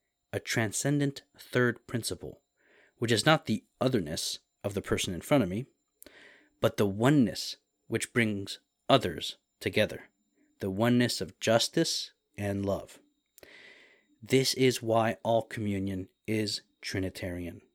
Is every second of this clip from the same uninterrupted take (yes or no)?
yes